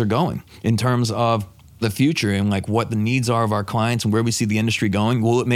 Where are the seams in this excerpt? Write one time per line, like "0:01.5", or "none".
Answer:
none